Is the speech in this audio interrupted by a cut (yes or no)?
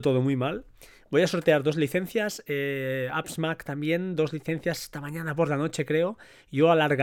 no